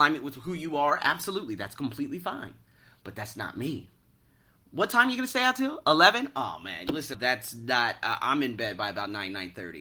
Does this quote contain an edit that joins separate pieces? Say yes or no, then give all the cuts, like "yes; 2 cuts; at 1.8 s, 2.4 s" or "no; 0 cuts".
yes; 1 cut; at 7.1 s